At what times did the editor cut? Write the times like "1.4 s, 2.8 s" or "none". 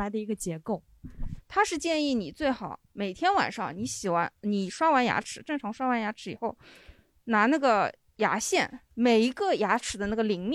1.4 s, 8.9 s